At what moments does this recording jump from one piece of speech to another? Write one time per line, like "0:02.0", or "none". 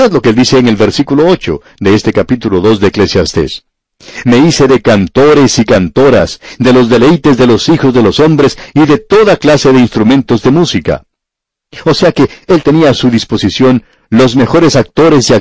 0:04.2